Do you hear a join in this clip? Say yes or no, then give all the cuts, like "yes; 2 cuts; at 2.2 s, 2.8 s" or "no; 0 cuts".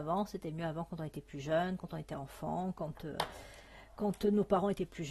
no; 0 cuts